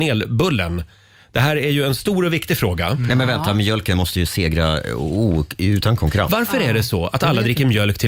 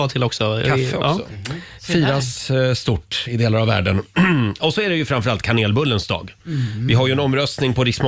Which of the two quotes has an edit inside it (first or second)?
second